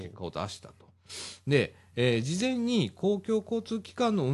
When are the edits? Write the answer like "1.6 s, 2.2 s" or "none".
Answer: none